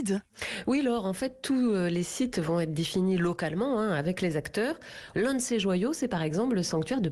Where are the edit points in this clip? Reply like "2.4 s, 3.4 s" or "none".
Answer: 5.1 s

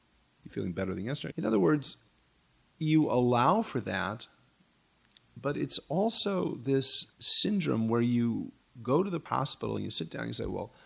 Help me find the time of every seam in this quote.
1.3 s, 7.1 s

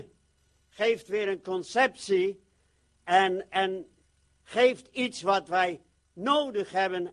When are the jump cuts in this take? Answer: none

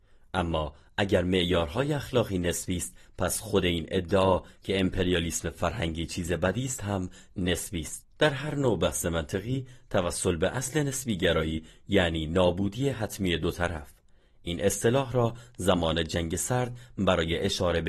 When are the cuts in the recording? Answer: 8.1 s

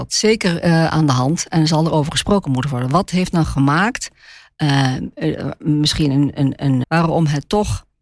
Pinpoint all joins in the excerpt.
6.8 s

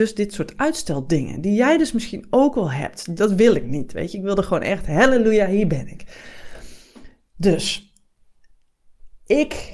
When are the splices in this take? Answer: 3.2 s

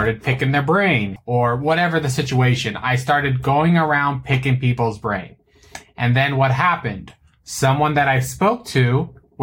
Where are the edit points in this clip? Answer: 1.2 s

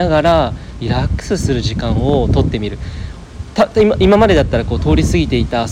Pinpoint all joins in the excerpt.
none

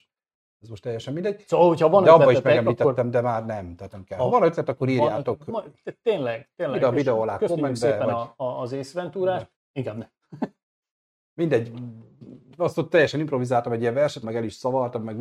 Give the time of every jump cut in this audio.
9.5 s, 14.2 s

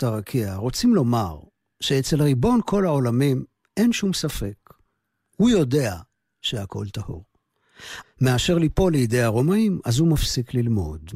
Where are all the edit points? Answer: 8.0 s

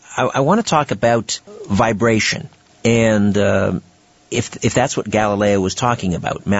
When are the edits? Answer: none

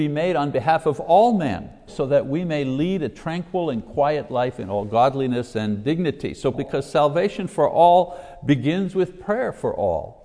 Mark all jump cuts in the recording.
1.9 s, 6.5 s

